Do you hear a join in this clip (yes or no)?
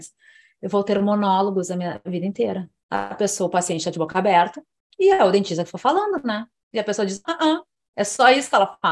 yes